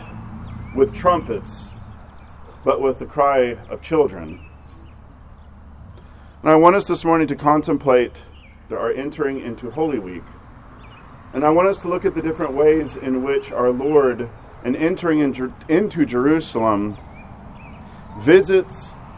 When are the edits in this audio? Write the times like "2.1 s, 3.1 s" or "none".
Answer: 8.7 s